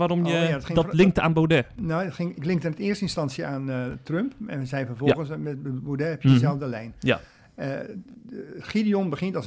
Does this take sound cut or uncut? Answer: uncut